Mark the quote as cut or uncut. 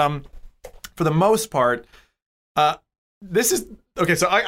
uncut